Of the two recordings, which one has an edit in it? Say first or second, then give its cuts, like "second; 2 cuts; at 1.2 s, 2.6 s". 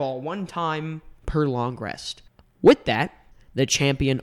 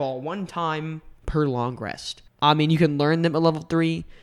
second; 1 cut; at 2.4 s